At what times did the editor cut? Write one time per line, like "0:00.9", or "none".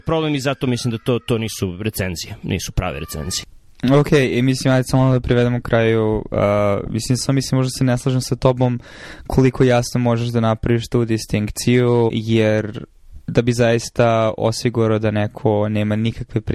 0:07.2
0:12.1
0:13.2